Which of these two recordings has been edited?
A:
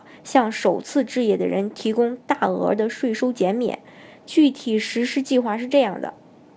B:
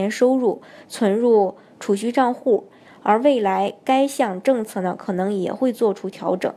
B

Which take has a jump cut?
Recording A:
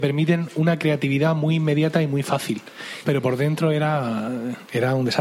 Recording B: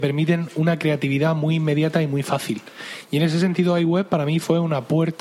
A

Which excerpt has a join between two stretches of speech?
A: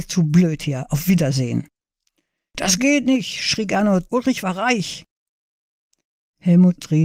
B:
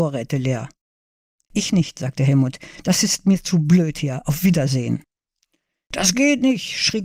A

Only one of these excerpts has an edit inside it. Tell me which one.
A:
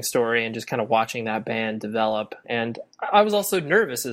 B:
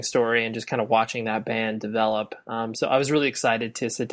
A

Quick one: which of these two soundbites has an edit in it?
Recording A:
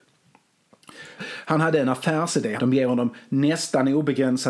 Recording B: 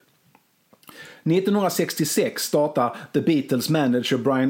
A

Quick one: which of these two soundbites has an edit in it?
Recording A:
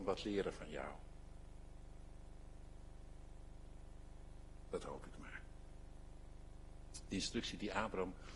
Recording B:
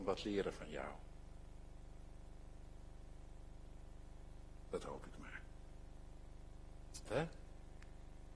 B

